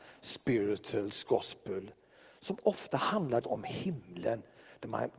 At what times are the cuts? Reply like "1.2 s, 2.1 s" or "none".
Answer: 3.4 s